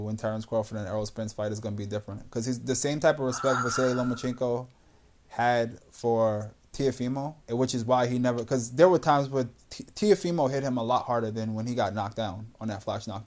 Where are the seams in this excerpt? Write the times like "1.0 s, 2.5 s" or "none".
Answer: 7.4 s